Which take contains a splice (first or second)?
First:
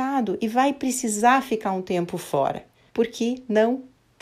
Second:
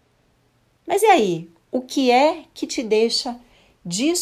first